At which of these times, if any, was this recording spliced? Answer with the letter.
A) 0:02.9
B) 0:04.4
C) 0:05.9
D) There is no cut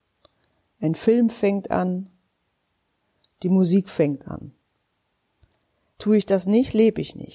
C